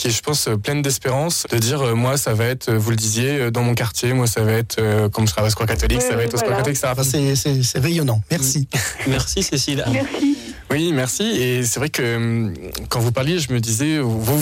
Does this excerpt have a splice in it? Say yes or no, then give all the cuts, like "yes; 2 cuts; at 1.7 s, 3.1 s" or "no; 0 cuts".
yes; 3 cuts; at 1.4 s, 7.0 s, 9.8 s